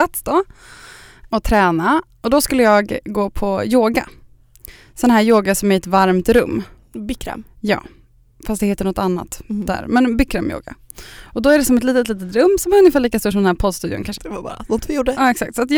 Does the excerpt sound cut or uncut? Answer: cut